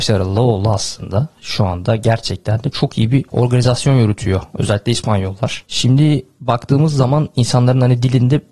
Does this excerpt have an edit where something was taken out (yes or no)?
no